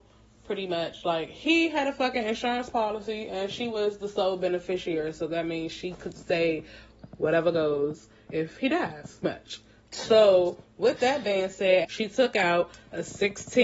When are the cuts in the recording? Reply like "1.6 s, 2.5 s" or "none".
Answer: 9.2 s, 11.8 s